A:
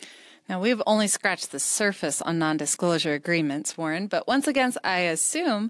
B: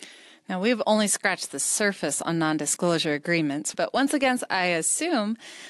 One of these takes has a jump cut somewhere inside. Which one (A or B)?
B